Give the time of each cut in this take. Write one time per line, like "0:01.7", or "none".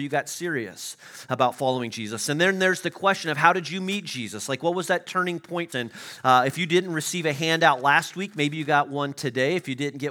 0:05.7